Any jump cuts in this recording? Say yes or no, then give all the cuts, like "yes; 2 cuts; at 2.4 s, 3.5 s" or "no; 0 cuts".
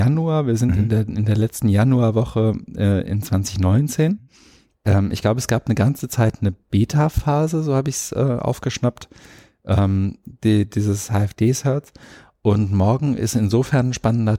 no; 0 cuts